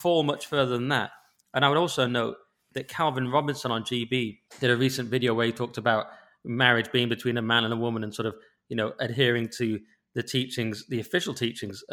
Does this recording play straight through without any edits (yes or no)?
yes